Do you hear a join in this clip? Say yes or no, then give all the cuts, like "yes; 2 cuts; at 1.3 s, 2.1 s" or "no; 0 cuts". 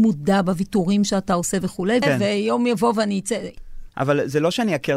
yes; 2 cuts; at 2.0 s, 3.9 s